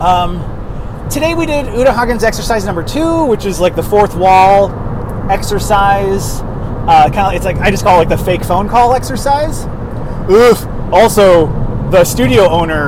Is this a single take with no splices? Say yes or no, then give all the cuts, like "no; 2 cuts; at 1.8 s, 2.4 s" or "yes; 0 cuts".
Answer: no; 1 cut; at 1.1 s